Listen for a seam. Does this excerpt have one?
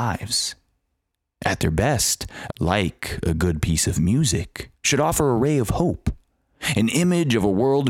yes; 2 cuts; at 2.5 s, 4.7 s

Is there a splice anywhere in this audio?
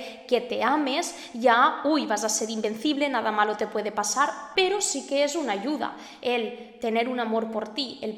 yes; 1 cut; at 4.5 s

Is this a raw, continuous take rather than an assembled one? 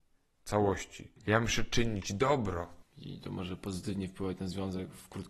no; 2 cuts; at 1.2 s, 2.8 s

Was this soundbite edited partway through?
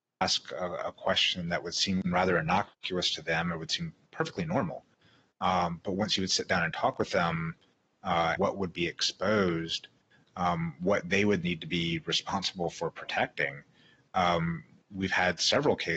yes; 2 cuts; at 8.4 s, 11.4 s

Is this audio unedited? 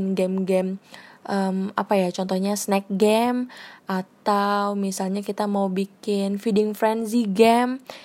yes; 0 cuts

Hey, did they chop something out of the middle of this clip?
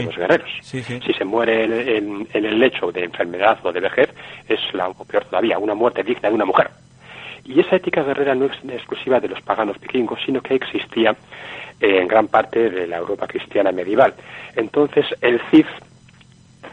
yes; 2 cuts; at 1.7 s, 4.9 s

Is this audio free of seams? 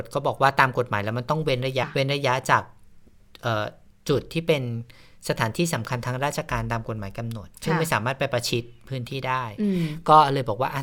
no; 1 cut; at 1.8 s

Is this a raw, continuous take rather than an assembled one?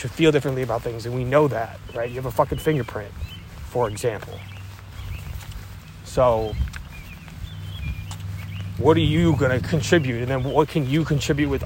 no; 1 cut; at 8.8 s

